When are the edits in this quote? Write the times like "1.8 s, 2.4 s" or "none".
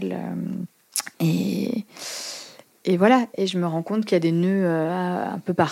none